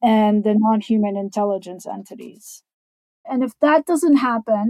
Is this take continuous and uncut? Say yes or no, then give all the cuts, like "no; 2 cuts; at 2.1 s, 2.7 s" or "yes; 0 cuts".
no; 1 cut; at 3.2 s